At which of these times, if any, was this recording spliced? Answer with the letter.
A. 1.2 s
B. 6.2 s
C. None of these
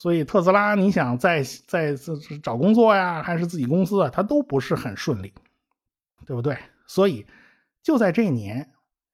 B